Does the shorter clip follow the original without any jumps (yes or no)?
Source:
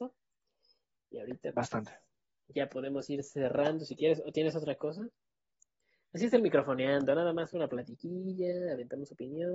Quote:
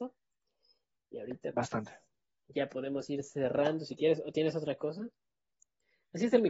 yes